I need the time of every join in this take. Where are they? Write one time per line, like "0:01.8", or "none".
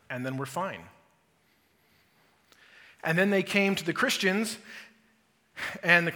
none